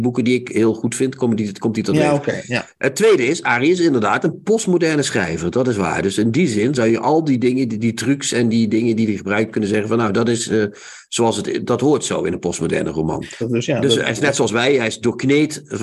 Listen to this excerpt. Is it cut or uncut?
cut